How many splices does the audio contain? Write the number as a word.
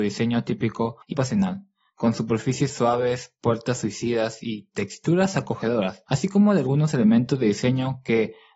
one